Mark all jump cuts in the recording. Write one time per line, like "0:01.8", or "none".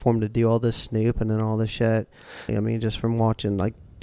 0:02.5